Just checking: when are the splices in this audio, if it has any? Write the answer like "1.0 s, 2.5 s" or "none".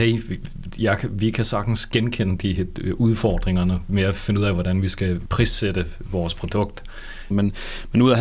7.3 s